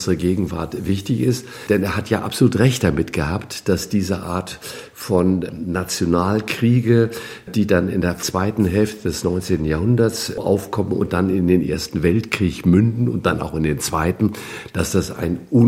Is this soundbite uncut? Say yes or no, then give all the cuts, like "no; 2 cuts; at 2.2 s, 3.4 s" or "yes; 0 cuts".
yes; 0 cuts